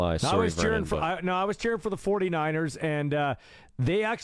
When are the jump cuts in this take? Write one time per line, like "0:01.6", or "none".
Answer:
none